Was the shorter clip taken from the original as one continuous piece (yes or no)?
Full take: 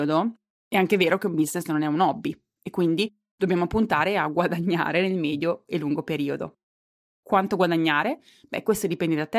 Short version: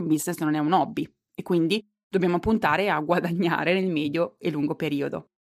yes